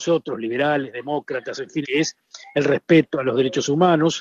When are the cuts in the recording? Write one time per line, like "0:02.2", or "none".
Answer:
0:01.8